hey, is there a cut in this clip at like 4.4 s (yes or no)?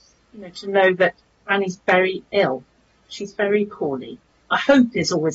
yes